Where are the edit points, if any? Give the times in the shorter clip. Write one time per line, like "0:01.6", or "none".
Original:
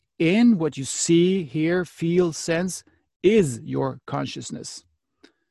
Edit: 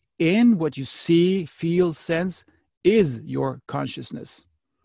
0:01.5